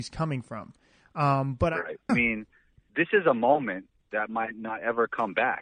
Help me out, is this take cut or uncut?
cut